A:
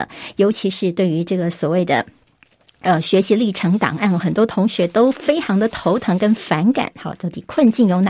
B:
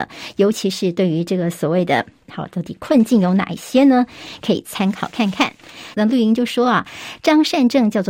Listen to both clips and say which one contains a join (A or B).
B